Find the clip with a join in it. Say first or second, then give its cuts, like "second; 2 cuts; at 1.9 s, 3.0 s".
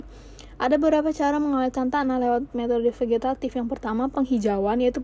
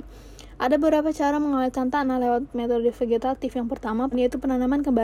second; 1 cut; at 4.1 s